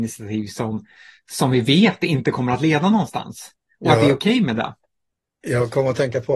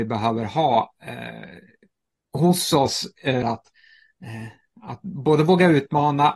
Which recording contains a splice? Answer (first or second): second